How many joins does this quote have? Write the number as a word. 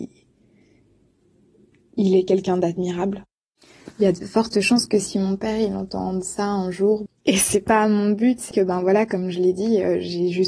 two